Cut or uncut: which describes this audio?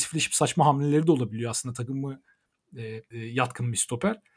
cut